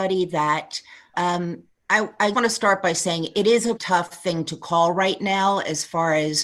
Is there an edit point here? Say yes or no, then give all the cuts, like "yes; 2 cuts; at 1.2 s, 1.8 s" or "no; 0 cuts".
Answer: yes; 3 cuts; at 1.1 s, 2.3 s, 3.8 s